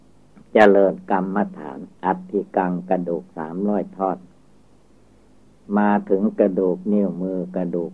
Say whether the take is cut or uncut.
cut